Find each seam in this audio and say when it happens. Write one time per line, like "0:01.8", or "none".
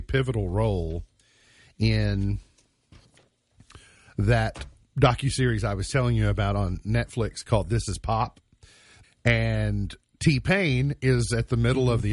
0:09.0